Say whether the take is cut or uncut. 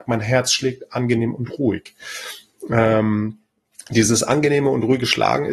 uncut